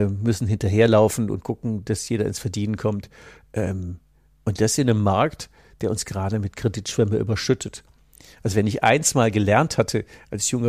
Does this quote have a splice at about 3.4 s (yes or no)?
no